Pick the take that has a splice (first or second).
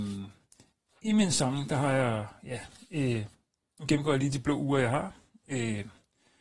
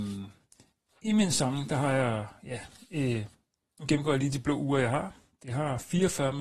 second